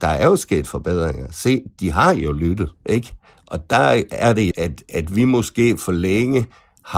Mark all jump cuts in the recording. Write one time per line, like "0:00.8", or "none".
0:02.8
0:04.5